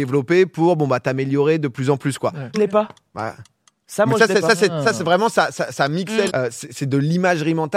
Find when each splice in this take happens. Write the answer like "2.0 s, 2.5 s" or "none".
2.5 s, 6.3 s